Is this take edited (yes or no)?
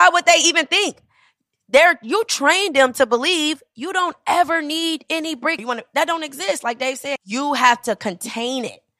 yes